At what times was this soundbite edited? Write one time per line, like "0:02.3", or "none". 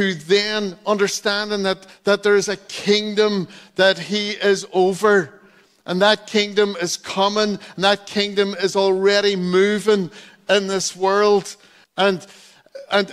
0:11.8